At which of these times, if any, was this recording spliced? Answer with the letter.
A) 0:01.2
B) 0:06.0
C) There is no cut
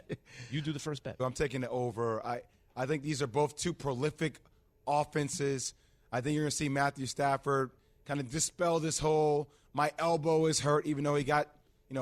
A